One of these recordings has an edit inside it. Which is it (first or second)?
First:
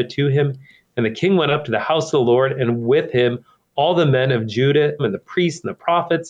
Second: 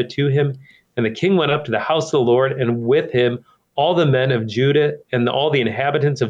first